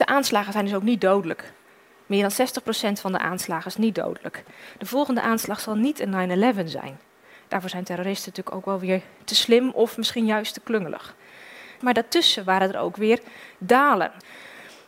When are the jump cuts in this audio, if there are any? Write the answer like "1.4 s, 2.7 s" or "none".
11.8 s